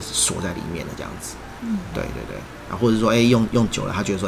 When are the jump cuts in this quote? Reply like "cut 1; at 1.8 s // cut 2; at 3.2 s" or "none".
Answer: none

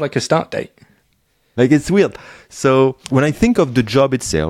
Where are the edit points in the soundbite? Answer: cut 1; at 1.6 s // cut 2; at 3.1 s

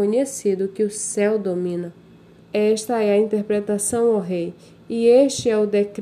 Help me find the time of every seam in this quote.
cut 1; at 2.4 s

